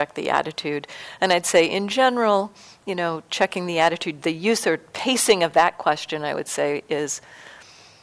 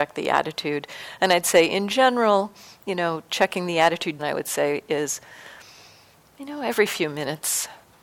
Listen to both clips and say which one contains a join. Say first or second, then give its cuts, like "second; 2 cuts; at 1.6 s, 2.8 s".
second; 1 cut; at 4.2 s